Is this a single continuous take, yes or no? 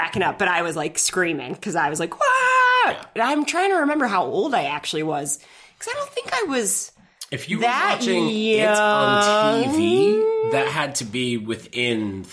yes